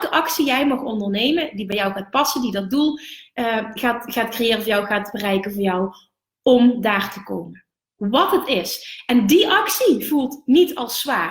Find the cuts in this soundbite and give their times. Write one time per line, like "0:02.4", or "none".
none